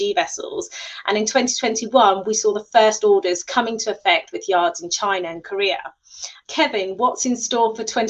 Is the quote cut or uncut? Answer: cut